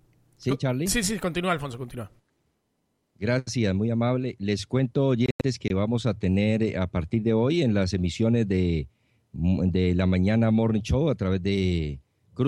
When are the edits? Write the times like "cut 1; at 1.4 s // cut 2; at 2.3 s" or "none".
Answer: none